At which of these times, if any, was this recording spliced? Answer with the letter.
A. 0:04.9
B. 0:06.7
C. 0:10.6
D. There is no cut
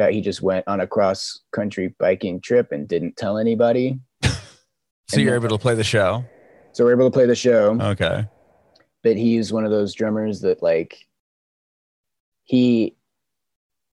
A